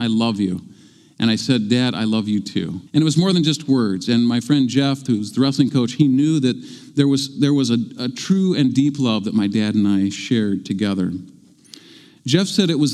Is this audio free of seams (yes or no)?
no